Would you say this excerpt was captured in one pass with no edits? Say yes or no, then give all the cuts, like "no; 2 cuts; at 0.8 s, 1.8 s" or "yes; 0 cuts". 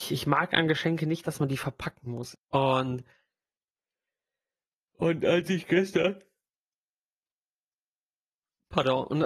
no; 1 cut; at 2.3 s